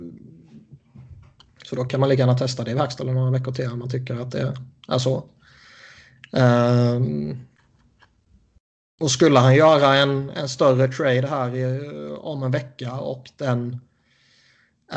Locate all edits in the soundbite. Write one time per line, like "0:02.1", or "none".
0:01.6